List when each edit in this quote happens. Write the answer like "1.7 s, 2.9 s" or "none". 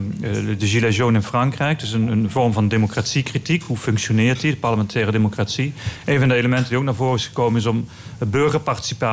none